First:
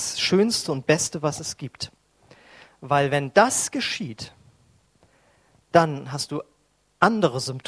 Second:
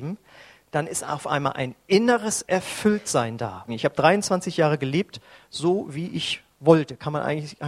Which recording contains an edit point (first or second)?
second